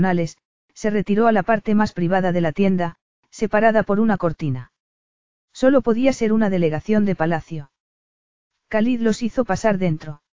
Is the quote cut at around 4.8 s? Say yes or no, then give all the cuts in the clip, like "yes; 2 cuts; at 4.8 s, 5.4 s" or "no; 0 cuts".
no; 0 cuts